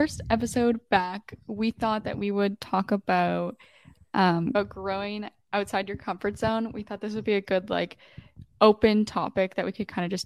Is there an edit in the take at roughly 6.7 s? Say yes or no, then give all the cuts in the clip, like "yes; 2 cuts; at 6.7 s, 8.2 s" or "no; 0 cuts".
no; 0 cuts